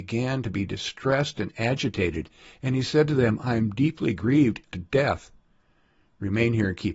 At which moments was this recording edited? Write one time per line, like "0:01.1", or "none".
0:04.7

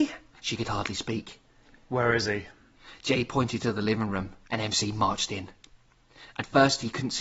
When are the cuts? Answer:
none

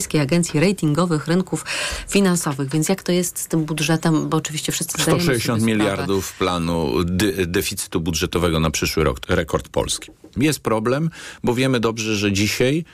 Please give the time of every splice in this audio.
0:09.2
0:10.4

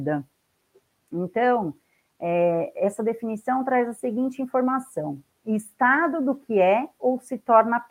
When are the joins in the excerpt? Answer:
0:01.0

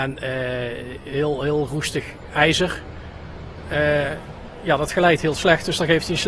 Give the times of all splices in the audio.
none

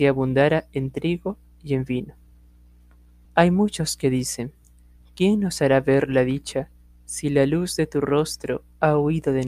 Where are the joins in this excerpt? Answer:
0:03.3

